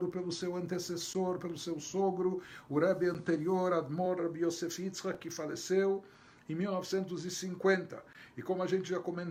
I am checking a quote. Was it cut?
no; 0 cuts

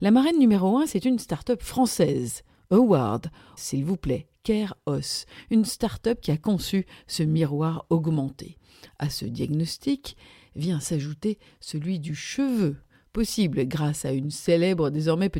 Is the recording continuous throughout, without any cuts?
no; 2 cuts; at 3.6 s, 8.9 s

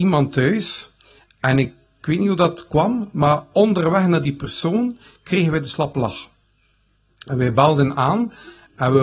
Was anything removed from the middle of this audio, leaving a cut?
no; 0 cuts

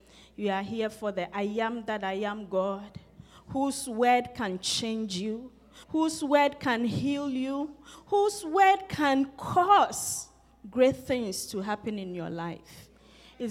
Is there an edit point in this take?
yes; 2 cuts; at 5.8 s, 7.9 s

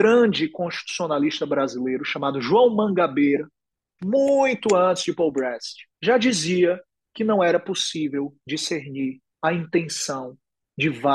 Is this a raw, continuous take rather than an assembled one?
no; 3 cuts; at 4.0 s, 5.9 s, 9.3 s

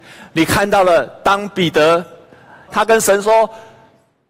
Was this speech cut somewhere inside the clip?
yes; 1 cut; at 2.7 s

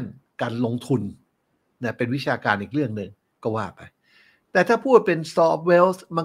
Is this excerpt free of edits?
yes; 0 cuts

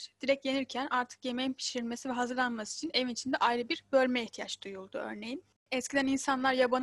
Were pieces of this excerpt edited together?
no; 0 cuts

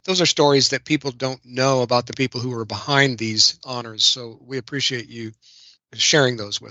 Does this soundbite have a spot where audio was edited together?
no; 0 cuts

